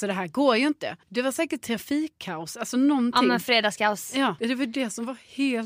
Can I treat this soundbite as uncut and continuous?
no; 2 cuts; at 1.0 s, 4.4 s

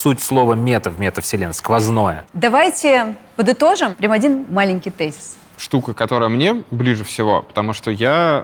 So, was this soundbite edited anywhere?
yes; 2 cuts; at 2.3 s, 5.6 s

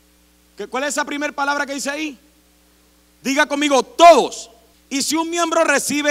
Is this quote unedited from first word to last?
no; 1 cut; at 4.7 s

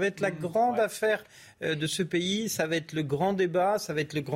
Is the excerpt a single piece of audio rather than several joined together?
yes; 0 cuts

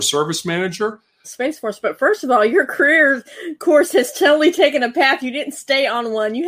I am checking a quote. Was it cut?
yes; 1 cut; at 1.2 s

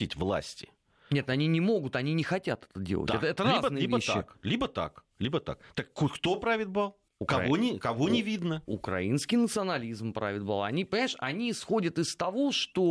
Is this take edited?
yes; 1 cut; at 7.1 s

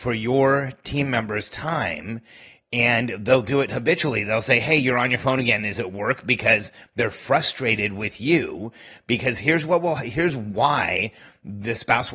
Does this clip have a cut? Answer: no; 0 cuts

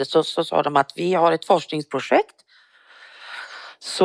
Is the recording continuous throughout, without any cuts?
yes; 0 cuts

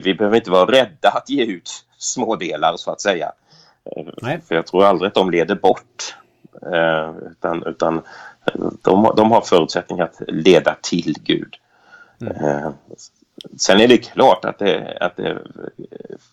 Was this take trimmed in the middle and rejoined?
no; 0 cuts

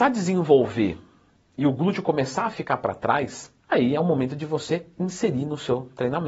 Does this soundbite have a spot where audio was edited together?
yes; 1 cut; at 3.6 s

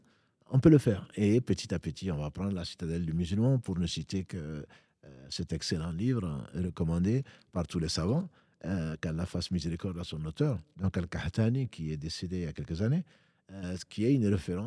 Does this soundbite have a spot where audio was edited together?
no; 0 cuts

